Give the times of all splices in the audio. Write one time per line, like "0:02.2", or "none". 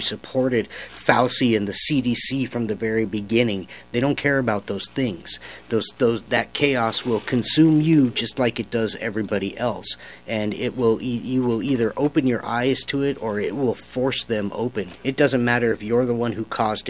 0:15.0